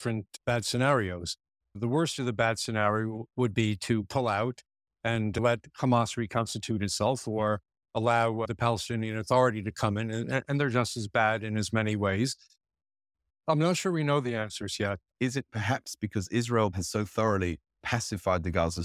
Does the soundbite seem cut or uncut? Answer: cut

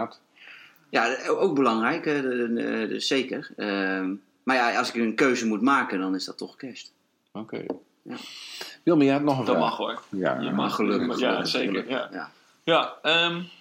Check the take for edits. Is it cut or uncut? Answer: uncut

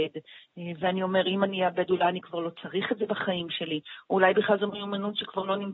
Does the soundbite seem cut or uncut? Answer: uncut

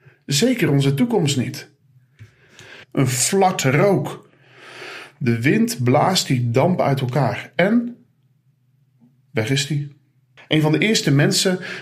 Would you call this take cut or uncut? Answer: cut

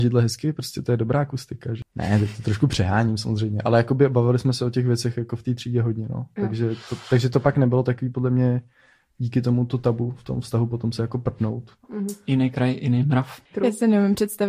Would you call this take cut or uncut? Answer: uncut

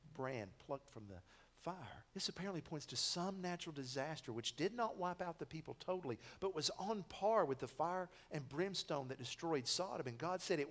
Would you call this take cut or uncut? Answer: cut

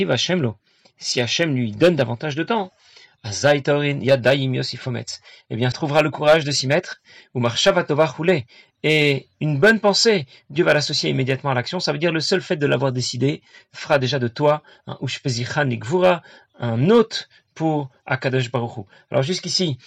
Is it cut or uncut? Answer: cut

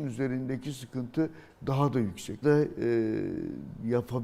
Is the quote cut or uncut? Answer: cut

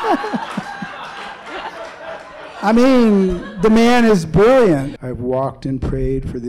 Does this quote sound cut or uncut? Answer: cut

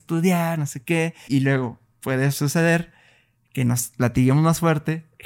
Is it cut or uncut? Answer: cut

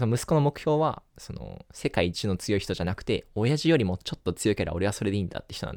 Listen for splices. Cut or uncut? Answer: uncut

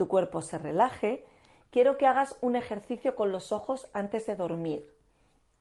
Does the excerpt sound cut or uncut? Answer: uncut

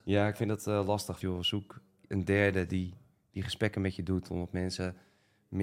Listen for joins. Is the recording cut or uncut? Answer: cut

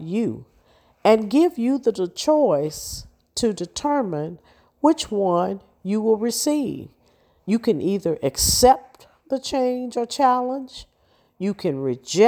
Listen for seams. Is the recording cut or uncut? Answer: uncut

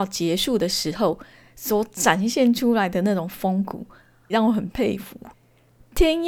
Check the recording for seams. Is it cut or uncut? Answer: cut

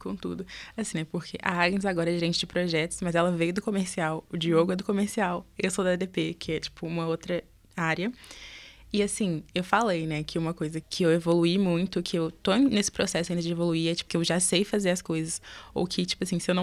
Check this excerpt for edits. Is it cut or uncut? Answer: cut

